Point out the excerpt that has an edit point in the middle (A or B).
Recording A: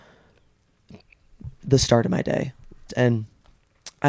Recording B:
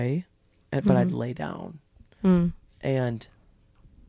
A